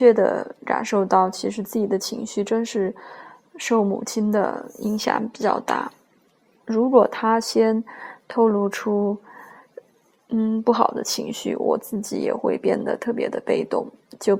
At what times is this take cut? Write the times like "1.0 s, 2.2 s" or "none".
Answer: none